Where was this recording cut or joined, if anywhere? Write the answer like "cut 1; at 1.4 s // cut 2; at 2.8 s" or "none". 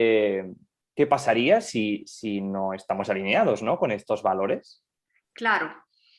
none